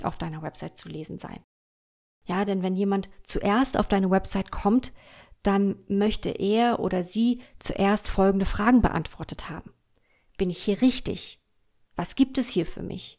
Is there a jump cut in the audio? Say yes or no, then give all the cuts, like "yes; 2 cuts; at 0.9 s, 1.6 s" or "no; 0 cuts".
no; 0 cuts